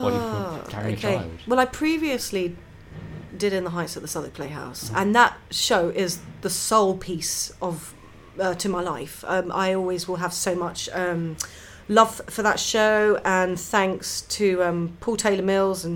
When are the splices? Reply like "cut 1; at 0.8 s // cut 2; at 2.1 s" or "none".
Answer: none